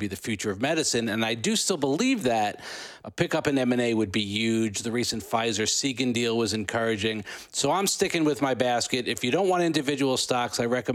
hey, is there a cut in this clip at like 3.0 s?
yes; 1 cut; at 3.0 s

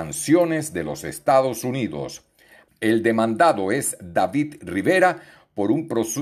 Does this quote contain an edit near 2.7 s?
yes; 1 cut; at 2.7 s

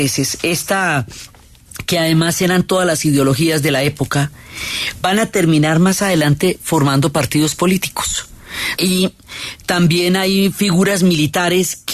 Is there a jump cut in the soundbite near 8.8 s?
yes; 1 cut; at 8.8 s

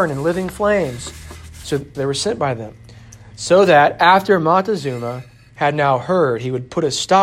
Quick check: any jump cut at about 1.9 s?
yes; 1 cut; at 1.9 s

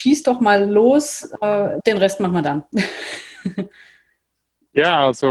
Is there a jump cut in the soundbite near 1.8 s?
yes; 1 cut; at 1.8 s

